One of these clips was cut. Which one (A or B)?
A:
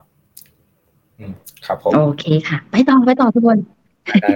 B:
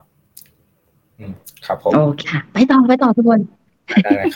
B